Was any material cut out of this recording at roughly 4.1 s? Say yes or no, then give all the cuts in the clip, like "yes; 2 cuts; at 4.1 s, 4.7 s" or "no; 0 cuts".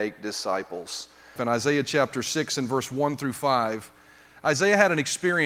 no; 1 cut; at 1.4 s